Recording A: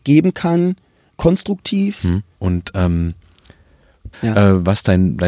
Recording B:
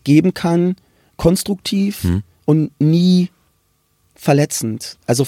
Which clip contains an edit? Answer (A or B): A